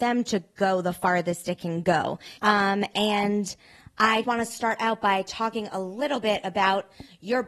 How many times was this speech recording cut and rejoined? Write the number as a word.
two